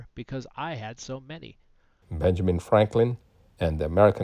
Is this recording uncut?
no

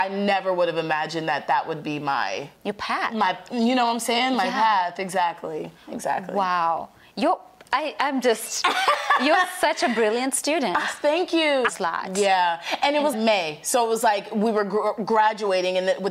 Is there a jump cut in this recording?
yes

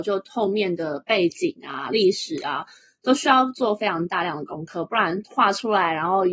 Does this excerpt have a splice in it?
no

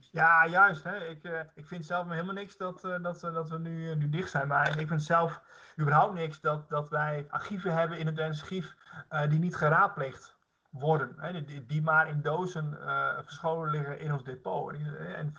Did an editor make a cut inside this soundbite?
no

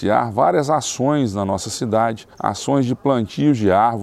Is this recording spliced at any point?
no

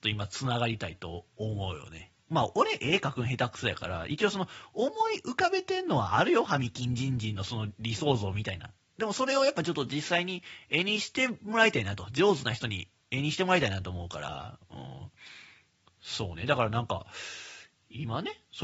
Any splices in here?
yes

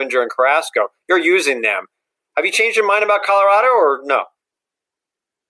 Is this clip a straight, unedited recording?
yes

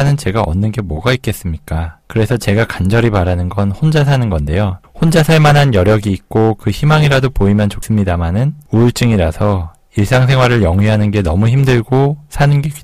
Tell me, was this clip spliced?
no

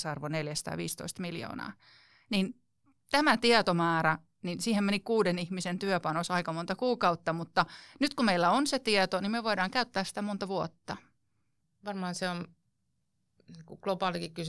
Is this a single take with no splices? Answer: yes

